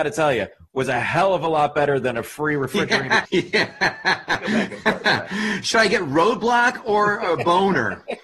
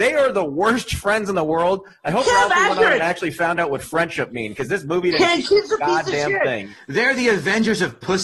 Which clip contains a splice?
first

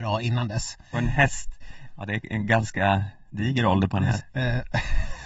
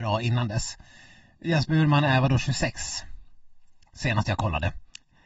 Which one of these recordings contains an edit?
first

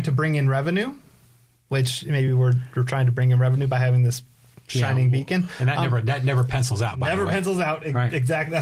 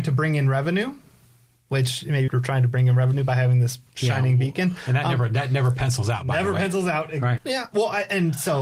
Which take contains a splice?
second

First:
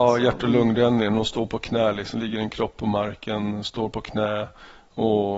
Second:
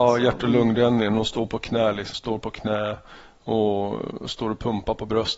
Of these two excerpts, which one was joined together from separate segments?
second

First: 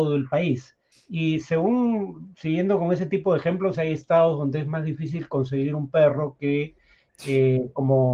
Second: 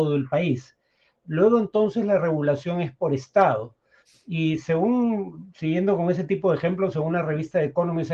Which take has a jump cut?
first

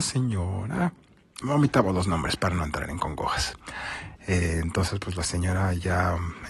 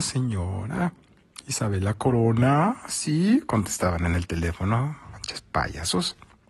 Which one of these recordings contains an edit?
first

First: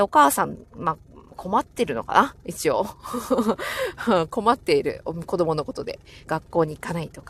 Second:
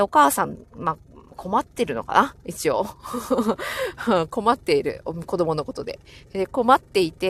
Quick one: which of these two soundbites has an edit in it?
first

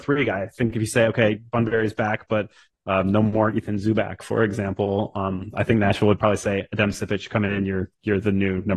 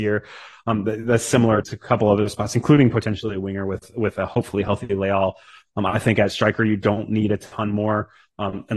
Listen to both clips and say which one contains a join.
second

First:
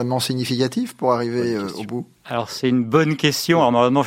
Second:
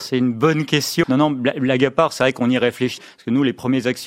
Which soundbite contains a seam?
second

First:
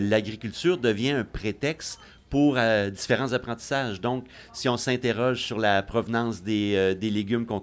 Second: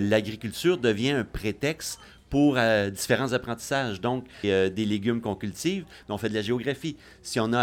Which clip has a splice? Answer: second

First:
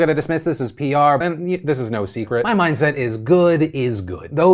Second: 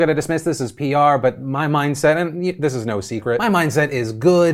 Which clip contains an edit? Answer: first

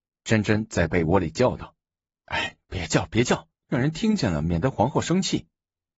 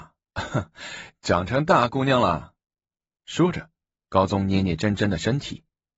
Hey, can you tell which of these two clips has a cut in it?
first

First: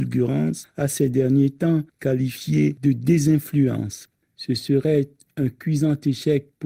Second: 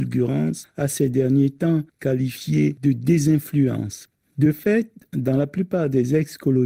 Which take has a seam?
first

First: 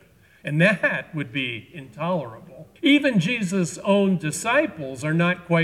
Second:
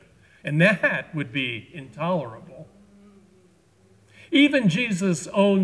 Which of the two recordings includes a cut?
first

